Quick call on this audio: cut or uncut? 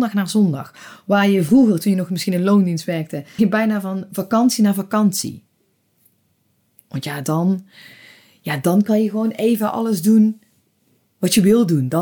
cut